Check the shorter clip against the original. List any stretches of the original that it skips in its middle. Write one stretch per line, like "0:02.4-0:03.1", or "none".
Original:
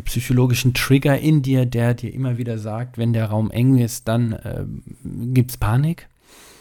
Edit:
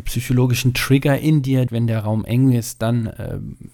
0:01.7-0:02.9